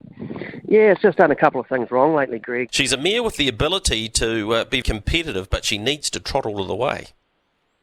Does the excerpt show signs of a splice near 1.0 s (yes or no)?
no